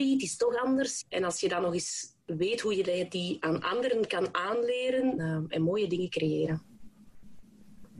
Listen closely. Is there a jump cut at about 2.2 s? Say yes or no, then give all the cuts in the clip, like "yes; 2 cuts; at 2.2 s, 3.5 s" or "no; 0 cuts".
yes; 3 cuts; at 1.0 s, 2.2 s, 5.2 s